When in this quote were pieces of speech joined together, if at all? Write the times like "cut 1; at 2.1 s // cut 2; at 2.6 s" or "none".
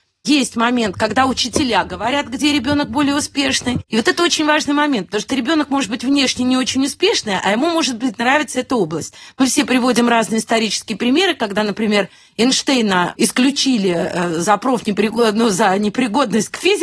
cut 1; at 3.9 s // cut 2; at 13.1 s